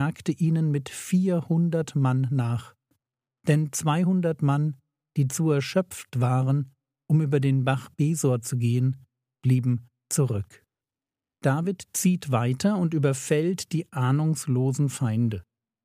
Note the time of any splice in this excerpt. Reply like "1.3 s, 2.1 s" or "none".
none